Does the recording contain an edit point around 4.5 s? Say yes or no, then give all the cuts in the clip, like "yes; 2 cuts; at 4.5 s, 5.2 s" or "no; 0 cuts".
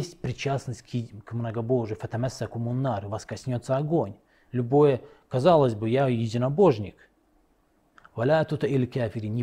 yes; 2 cuts; at 4.5 s, 8.0 s